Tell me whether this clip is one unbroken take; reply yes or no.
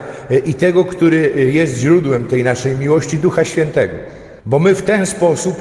no